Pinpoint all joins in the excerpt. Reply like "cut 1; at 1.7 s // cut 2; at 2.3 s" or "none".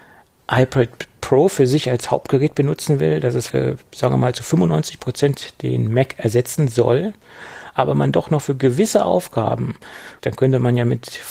cut 1; at 3.5 s // cut 2; at 10.2 s